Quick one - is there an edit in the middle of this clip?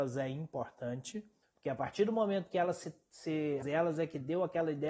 yes; 2 cuts; at 1.4 s, 3.6 s

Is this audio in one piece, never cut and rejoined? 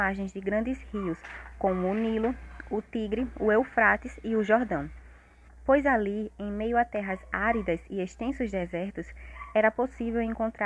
no; 1 cut; at 5.5 s

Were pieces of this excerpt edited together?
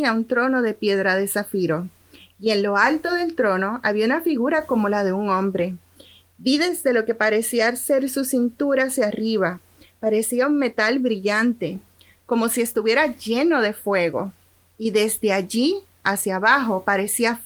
no; 0 cuts

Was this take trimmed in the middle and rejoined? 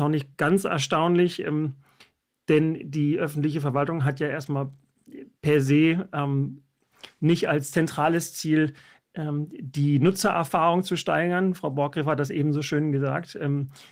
no; 0 cuts

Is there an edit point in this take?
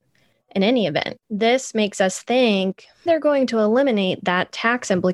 yes; 2 cuts; at 1.2 s, 3.1 s

